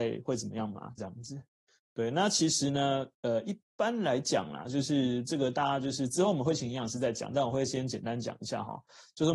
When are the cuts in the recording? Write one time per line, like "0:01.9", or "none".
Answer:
0:01.0